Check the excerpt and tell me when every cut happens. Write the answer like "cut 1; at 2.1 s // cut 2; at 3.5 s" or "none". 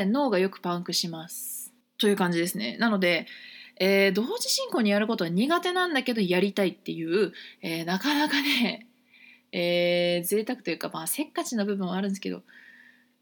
cut 1; at 1.8 s